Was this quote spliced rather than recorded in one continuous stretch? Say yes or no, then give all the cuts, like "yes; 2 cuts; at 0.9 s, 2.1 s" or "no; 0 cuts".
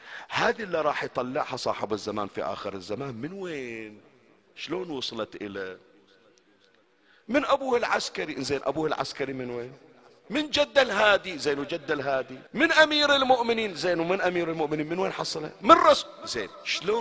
yes; 1 cut; at 12.5 s